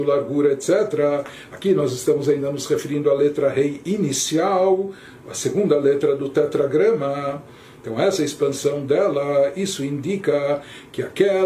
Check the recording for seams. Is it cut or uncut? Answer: uncut